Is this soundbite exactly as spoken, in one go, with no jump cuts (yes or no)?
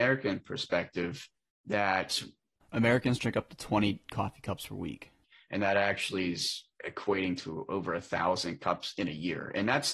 yes